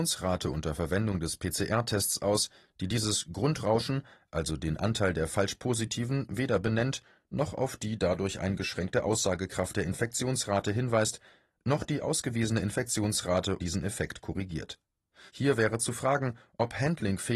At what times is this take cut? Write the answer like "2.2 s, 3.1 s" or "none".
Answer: 13.6 s, 15.3 s